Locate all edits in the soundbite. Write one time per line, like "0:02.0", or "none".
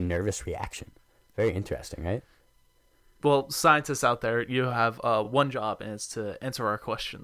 none